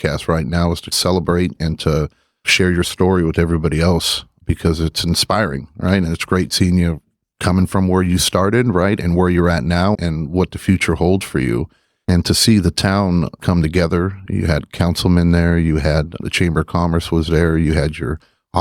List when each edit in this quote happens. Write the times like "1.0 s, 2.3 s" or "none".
none